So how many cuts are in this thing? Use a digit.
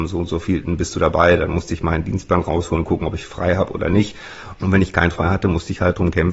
1